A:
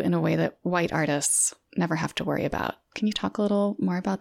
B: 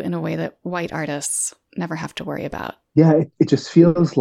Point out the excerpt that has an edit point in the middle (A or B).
B